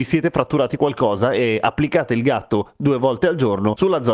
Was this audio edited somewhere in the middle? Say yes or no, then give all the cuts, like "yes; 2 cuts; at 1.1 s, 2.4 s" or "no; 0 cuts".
no; 0 cuts